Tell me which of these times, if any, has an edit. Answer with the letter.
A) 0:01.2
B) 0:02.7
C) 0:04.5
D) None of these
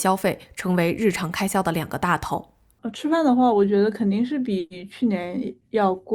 D